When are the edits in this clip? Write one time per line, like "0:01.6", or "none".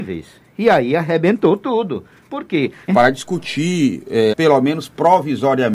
0:02.9
0:04.3